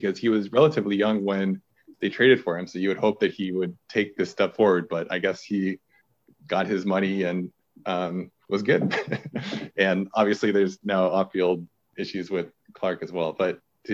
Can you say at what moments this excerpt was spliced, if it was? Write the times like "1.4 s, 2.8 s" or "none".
none